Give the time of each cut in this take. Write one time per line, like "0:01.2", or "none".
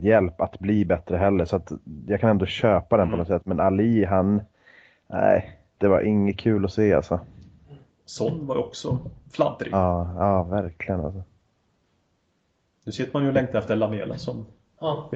0:05.8

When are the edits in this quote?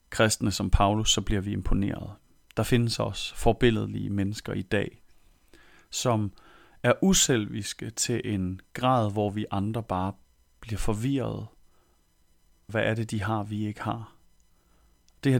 0:12.7

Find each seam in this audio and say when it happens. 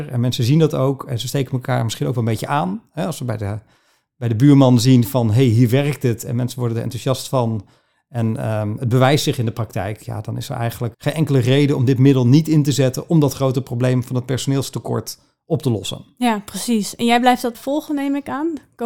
0:10.9
0:17.5

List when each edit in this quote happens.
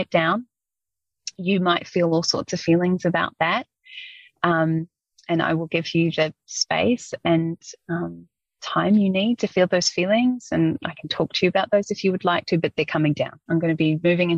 0:13.5

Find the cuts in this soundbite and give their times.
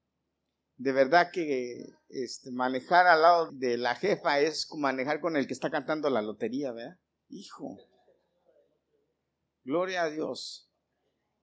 0:03.5
0:07.2

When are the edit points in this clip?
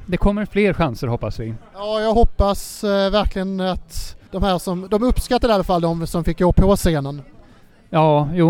0:04.3

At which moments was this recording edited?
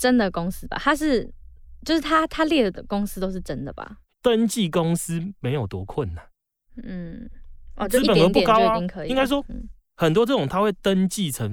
0:04.1

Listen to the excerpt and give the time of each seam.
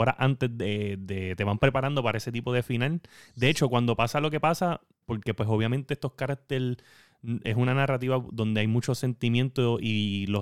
0:05.0

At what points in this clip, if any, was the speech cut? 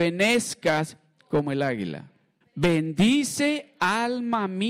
0:02.4

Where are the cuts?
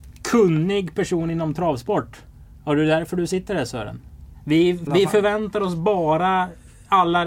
0:04.9

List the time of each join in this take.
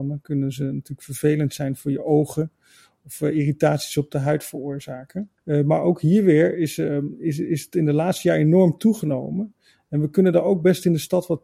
none

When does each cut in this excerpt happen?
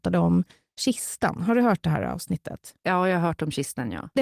none

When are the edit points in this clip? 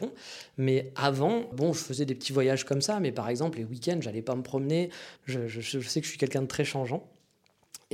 0:01.5
0:05.2

